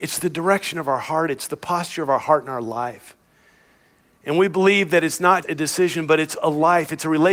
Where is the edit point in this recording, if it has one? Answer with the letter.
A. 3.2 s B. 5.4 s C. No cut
B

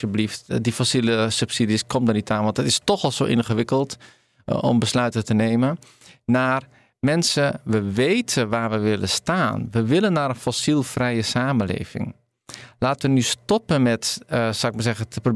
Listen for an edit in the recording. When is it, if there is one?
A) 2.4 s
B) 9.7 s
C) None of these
C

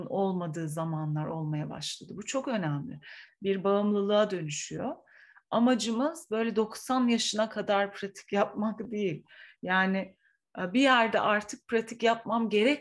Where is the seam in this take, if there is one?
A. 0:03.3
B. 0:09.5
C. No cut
A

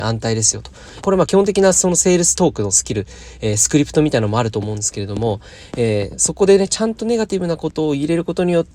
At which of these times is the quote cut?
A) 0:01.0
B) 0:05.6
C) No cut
A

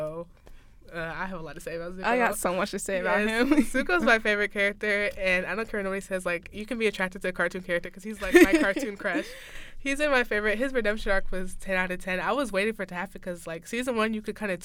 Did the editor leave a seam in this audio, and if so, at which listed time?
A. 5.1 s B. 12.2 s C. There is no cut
C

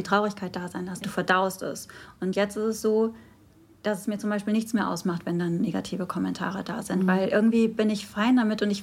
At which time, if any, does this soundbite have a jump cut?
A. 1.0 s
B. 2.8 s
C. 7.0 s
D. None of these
A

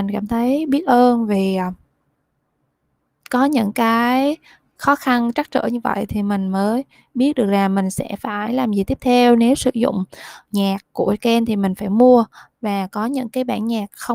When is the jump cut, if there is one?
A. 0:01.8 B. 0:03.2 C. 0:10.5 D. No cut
C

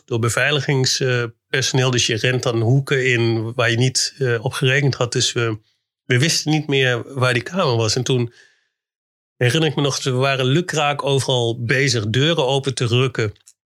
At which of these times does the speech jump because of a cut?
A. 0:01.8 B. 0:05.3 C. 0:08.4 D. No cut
D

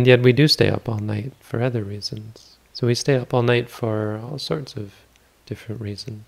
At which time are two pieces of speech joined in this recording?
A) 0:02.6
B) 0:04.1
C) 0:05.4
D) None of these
A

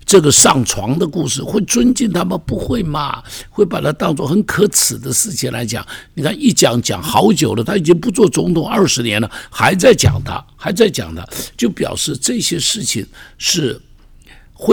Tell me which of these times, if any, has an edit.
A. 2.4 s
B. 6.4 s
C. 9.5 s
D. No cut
D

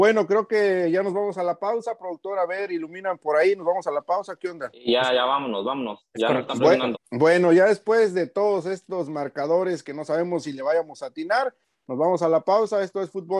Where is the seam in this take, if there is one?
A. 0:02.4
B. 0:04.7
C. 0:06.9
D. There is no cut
C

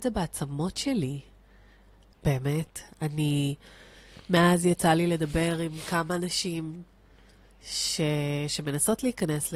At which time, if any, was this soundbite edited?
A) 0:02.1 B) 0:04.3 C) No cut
A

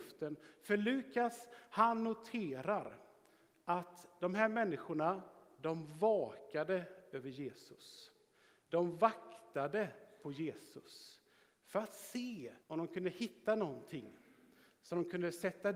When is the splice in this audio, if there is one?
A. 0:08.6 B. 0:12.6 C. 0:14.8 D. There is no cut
B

